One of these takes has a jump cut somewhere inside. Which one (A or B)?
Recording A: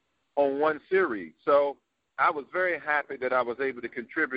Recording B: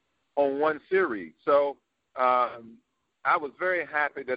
A